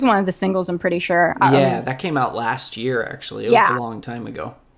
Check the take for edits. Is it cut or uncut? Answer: uncut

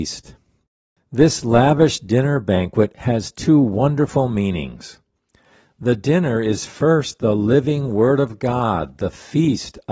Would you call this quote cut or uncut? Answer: uncut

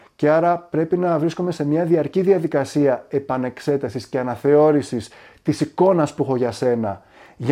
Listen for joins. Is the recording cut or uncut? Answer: uncut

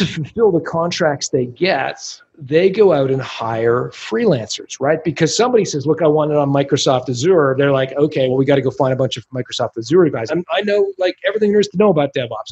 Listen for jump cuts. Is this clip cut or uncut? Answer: cut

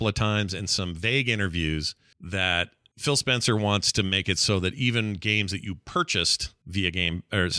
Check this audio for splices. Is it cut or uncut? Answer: uncut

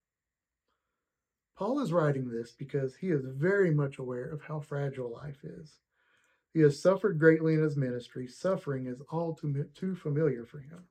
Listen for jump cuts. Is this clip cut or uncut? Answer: uncut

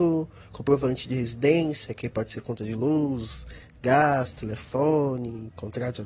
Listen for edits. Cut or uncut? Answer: uncut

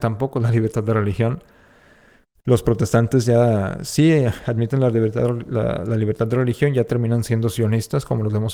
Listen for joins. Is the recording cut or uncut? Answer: uncut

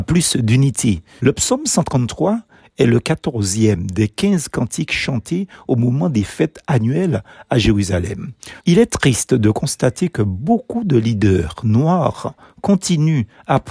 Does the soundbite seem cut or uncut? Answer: cut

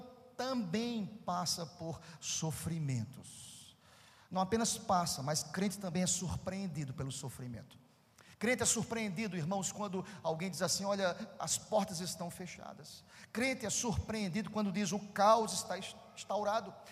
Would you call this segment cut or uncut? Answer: uncut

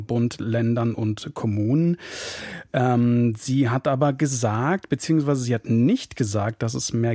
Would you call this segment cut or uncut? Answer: uncut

